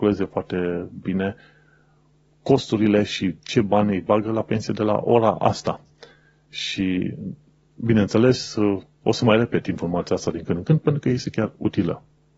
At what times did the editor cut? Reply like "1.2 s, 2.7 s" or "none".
none